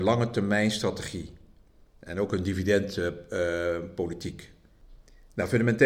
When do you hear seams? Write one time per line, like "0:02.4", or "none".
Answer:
none